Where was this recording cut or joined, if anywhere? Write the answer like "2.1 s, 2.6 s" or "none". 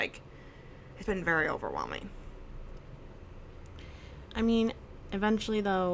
1.0 s

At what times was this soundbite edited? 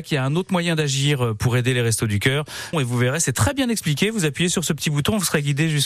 2.7 s

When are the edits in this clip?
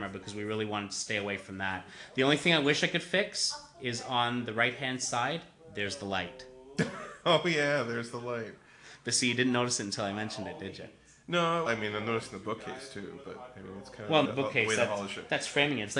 11.7 s, 14.2 s

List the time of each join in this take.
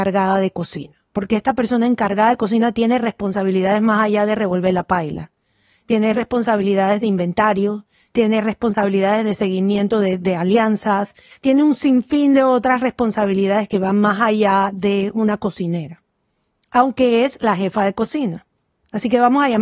none

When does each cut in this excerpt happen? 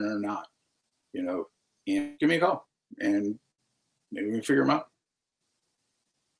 2.1 s

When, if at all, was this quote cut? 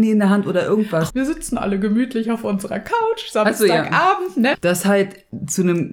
1.1 s, 4.5 s

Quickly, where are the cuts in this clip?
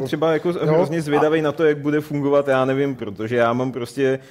3.0 s

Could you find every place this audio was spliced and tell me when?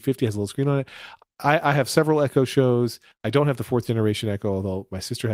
none

